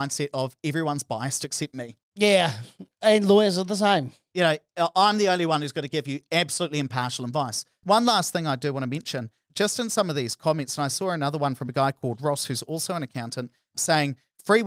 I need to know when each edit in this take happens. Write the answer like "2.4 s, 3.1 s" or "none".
7.8 s